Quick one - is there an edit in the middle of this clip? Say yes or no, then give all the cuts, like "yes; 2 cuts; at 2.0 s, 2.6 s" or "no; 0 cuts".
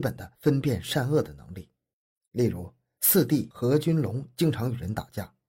no; 0 cuts